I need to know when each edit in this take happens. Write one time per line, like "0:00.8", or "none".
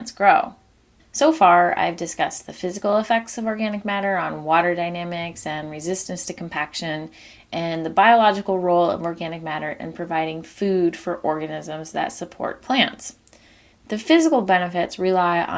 0:01.0
0:13.7